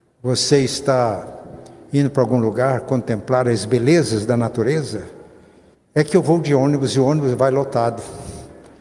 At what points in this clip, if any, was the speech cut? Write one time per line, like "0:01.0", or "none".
0:05.7